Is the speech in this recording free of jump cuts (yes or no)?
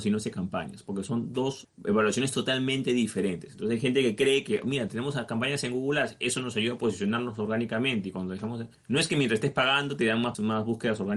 yes